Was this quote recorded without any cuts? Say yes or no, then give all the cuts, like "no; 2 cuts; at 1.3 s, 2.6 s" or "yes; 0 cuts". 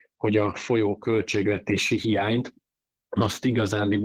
yes; 0 cuts